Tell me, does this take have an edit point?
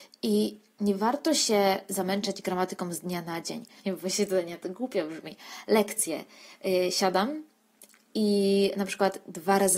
yes; 1 cut; at 3.8 s

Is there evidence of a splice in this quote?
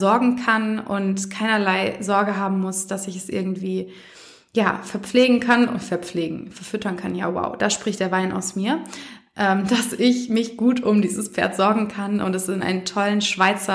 no; 0 cuts

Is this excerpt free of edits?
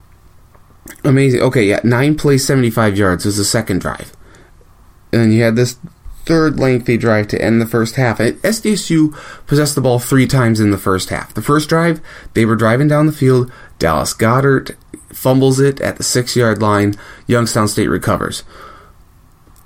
yes; 0 cuts

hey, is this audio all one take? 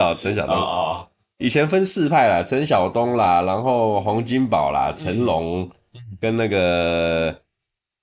yes; 0 cuts

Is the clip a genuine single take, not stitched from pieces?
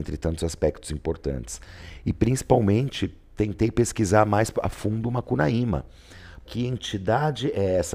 no; 1 cut; at 6.4 s

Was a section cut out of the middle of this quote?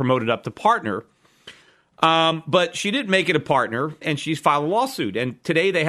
yes; 1 cut; at 4.0 s

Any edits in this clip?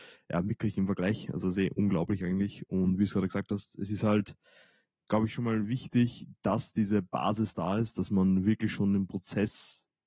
no; 0 cuts

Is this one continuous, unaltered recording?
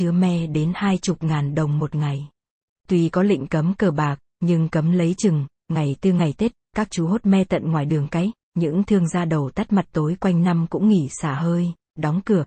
no; 1 cut; at 2.8 s

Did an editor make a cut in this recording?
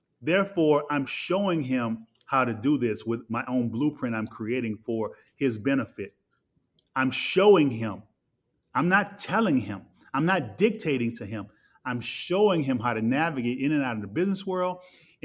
no; 0 cuts

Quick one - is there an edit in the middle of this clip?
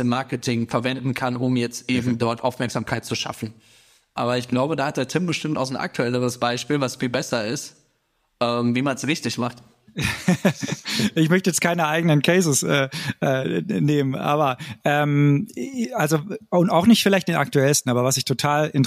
no; 0 cuts

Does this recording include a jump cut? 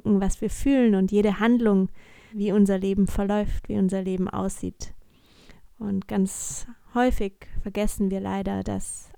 yes; 2 cuts; at 2.3 s, 5.7 s

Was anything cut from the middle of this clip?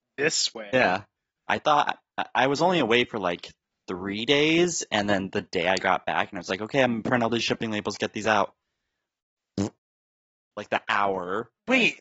yes; 1 cut; at 1.5 s

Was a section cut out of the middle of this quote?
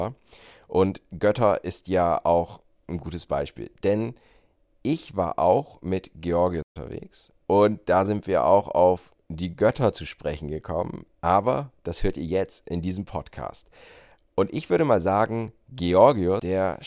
yes; 1 cut; at 7.4 s

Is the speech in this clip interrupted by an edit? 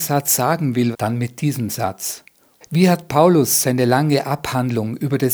yes; 2 cuts; at 0.9 s, 2.6 s

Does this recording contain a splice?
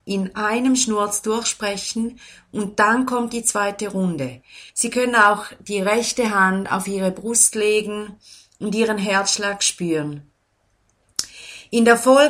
yes; 1 cut; at 4.7 s

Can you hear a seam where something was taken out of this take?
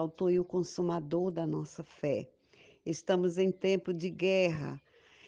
no; 0 cuts

